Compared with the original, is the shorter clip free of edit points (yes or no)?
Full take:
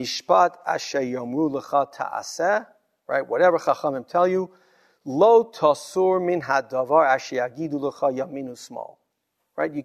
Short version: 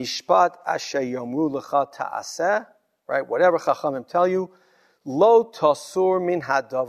yes